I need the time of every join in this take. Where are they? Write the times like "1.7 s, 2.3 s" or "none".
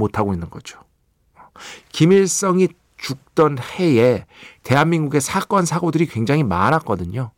1.8 s